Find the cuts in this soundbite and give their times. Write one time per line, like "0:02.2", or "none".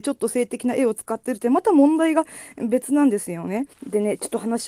0:03.7